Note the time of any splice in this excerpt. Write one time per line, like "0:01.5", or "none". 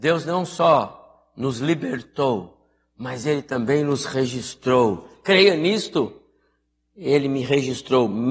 0:05.2